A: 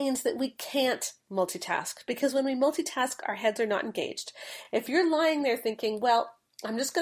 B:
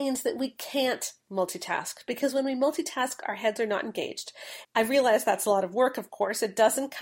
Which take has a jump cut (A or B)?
B